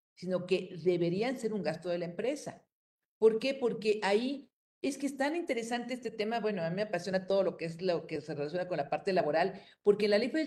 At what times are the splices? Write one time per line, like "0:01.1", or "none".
none